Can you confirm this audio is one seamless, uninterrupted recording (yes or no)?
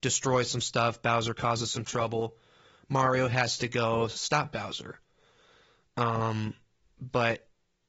yes